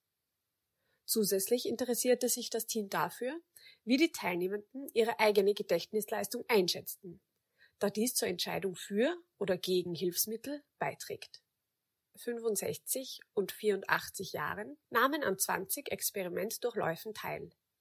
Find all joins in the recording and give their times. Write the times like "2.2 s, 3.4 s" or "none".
12.1 s, 14.8 s